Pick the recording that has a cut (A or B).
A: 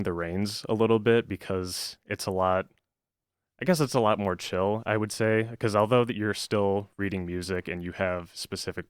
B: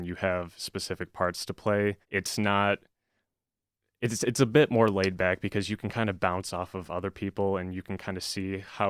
B